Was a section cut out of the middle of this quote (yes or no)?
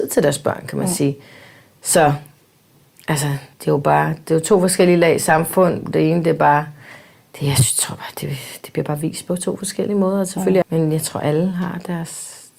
yes